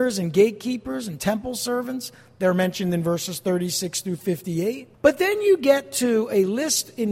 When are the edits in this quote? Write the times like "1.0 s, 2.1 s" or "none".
4.9 s